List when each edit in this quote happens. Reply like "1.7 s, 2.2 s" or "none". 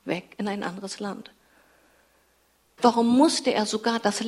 2.8 s